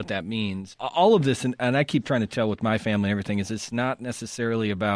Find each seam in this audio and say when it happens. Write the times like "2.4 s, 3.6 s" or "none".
1.6 s